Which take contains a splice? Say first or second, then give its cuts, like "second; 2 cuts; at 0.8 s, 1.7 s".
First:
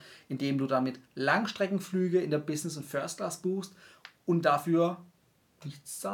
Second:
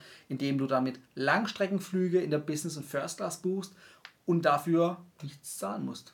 second; 1 cut; at 5.1 s